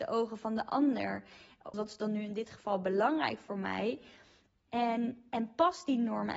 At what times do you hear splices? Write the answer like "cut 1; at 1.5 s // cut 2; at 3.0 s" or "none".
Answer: cut 1; at 1.7 s // cut 2; at 4.7 s